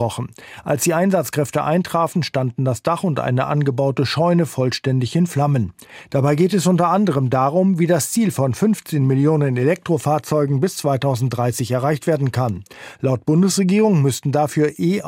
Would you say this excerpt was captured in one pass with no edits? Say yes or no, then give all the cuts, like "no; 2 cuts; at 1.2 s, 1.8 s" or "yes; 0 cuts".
no; 1 cut; at 6.1 s